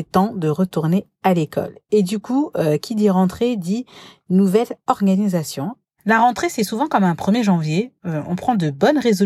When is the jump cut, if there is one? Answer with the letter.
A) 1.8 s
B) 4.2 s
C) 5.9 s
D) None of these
D